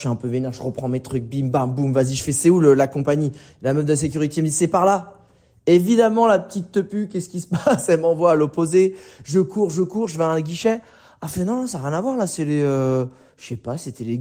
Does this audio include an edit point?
no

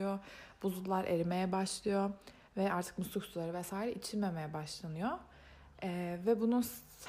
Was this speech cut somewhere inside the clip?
no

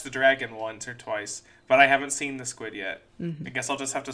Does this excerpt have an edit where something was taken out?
yes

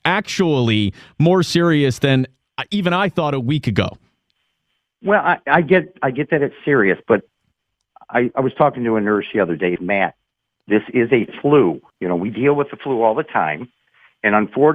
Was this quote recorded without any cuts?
no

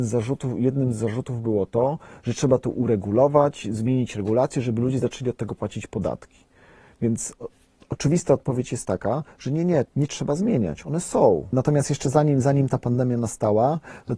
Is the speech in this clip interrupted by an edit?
yes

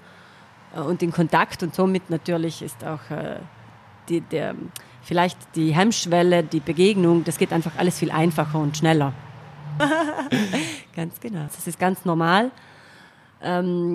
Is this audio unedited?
no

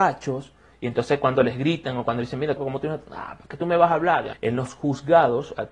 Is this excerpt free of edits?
no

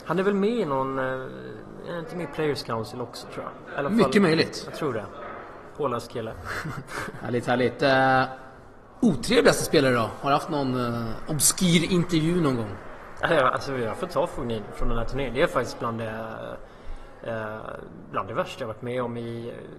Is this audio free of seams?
yes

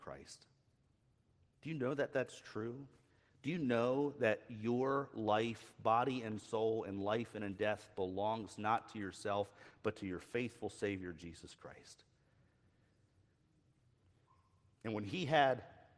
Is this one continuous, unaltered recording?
yes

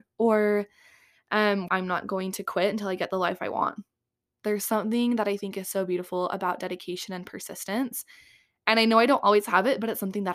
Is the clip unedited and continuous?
no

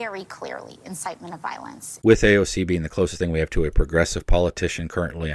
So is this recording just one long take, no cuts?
no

